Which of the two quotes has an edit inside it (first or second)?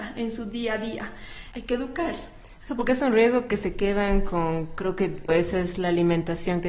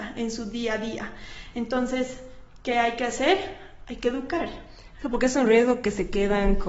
first